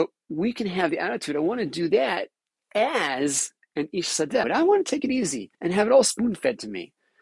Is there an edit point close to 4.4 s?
yes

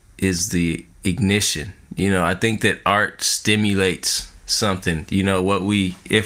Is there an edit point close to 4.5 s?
no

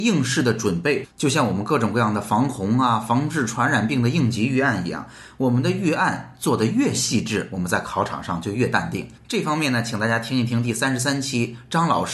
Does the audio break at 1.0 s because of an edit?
yes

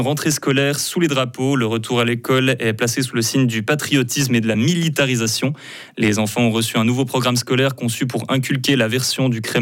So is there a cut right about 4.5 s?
yes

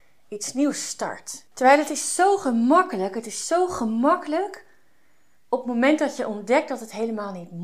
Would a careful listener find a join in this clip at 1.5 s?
yes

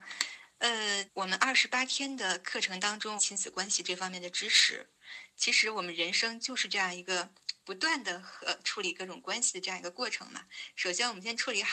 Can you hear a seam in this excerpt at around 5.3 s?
no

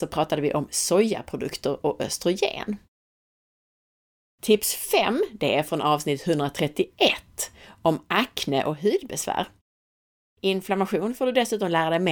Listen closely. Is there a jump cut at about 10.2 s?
yes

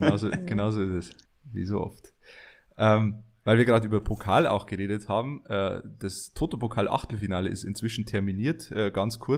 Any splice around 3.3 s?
no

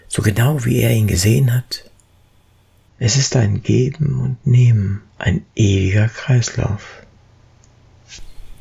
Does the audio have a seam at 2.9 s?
yes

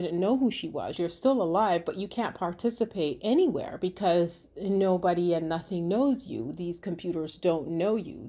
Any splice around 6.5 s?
no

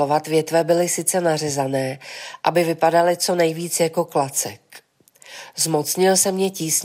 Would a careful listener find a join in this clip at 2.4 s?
yes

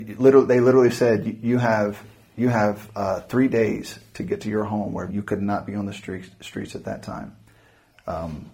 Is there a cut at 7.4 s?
no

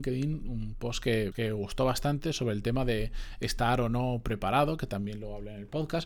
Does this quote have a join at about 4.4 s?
no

